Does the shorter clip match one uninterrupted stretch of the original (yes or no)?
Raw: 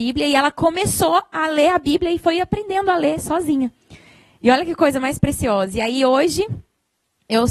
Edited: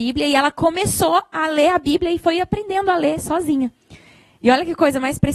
yes